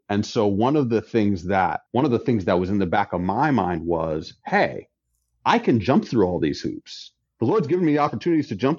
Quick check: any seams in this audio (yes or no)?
yes